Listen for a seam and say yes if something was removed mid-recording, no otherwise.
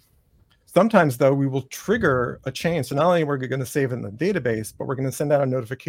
no